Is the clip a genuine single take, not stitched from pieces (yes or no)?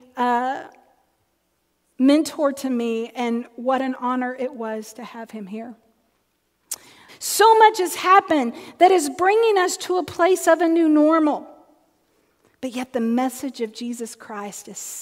no